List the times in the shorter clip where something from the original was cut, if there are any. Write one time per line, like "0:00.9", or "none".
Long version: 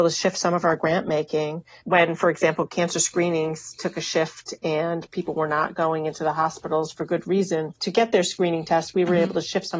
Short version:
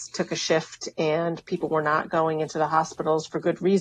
none